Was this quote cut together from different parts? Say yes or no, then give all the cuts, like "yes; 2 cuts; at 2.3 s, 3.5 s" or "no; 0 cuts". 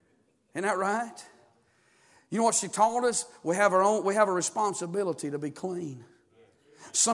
no; 0 cuts